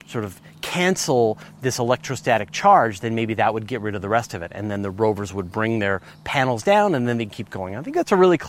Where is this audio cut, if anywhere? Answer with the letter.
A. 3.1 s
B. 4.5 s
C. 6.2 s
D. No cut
D